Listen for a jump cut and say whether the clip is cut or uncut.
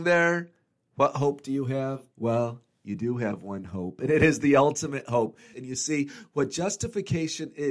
cut